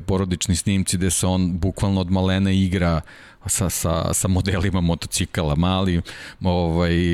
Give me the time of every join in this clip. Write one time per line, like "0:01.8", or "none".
0:03.7